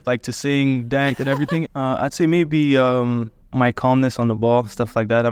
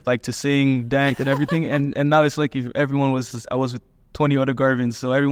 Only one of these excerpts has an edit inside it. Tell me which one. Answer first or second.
first